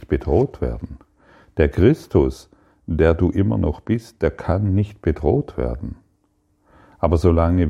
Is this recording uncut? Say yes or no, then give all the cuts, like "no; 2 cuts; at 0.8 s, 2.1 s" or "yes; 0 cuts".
yes; 0 cuts